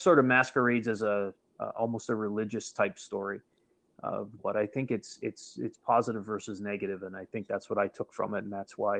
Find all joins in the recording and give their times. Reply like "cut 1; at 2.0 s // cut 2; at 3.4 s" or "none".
cut 1; at 4.4 s